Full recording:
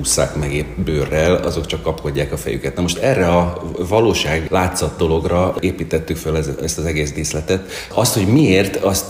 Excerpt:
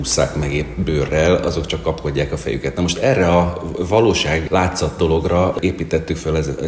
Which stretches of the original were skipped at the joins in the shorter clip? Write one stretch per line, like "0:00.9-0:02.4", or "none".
none

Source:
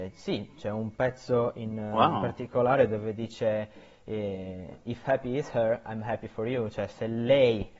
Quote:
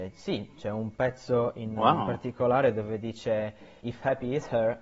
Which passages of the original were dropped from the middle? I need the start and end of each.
0:01.8-0:01.9
0:03.9-0:04.8

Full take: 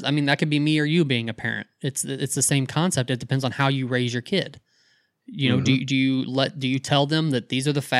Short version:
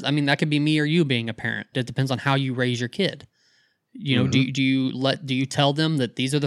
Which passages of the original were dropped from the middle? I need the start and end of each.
0:01.7-0:03.1

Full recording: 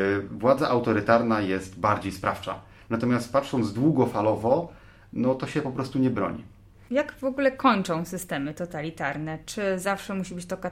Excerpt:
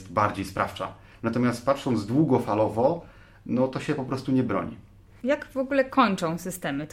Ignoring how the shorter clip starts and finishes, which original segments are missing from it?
none

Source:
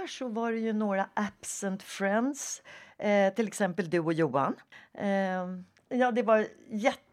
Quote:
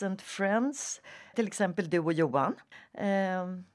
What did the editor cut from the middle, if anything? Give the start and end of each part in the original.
0:02.9-0:03.3

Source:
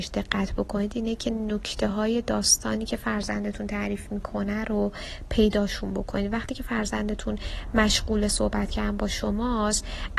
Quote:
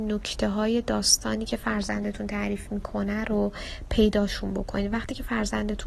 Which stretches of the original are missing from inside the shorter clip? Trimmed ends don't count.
none

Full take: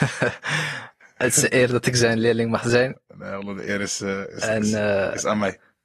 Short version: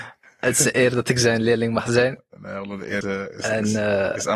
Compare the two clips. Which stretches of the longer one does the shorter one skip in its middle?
0:03.8-0:04.0

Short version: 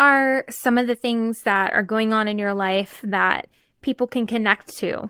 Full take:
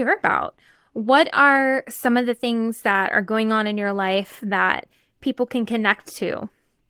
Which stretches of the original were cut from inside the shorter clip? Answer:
none

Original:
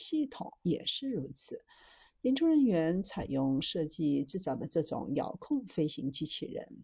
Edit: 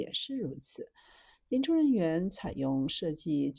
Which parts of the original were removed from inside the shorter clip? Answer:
none

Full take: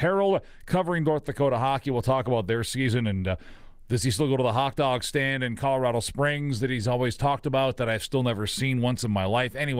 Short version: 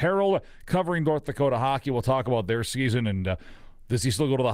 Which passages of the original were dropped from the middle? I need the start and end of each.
none

